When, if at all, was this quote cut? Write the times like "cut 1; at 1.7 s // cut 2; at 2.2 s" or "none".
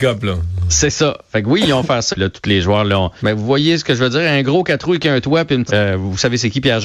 cut 1; at 2.1 s // cut 2; at 3.2 s // cut 3; at 5.7 s